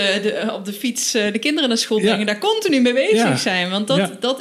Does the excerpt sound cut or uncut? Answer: uncut